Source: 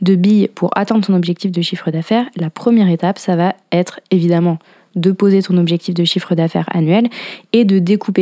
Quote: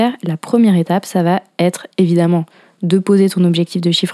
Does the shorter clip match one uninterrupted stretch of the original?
yes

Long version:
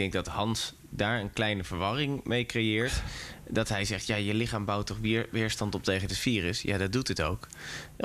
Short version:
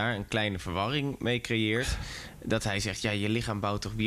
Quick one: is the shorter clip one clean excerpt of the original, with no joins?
yes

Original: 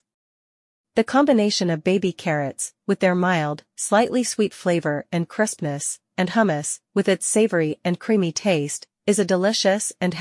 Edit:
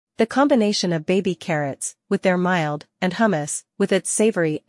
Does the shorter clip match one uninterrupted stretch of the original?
no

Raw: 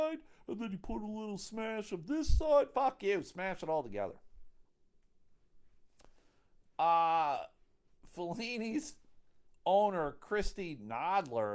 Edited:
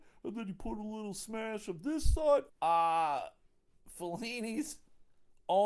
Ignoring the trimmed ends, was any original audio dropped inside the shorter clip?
yes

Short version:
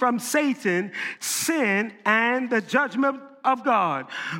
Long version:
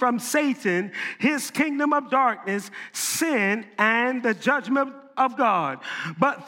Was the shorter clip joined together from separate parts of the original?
yes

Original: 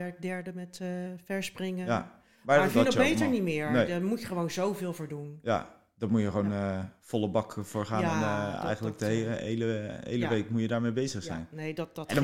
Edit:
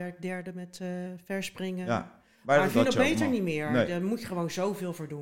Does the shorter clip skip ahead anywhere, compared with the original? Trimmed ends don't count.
no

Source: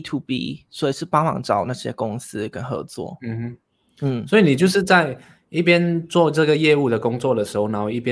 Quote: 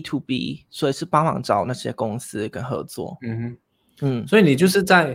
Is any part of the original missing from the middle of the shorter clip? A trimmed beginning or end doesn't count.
no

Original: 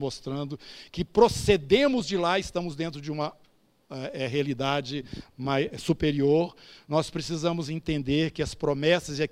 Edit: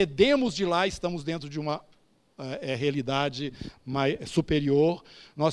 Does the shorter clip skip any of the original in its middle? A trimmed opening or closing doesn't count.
no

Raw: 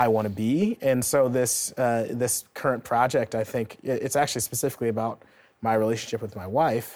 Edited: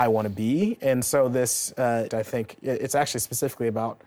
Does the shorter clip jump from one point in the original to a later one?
yes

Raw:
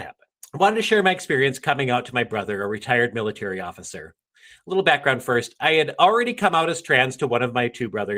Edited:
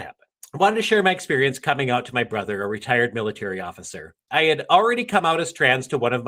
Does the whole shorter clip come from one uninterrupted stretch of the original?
no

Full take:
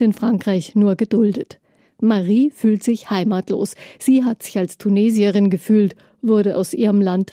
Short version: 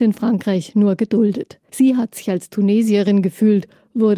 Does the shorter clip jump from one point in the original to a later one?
yes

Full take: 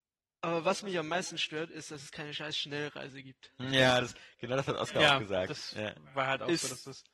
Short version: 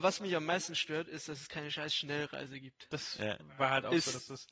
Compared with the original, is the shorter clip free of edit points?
no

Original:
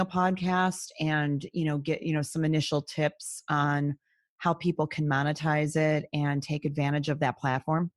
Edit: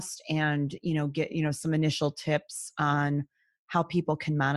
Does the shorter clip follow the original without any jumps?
yes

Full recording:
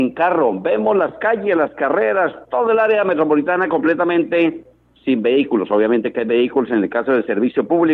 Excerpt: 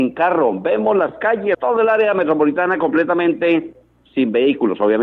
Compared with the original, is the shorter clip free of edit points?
no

